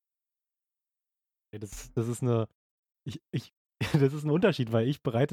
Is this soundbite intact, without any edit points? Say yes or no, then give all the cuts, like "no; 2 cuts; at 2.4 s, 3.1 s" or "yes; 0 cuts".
yes; 0 cuts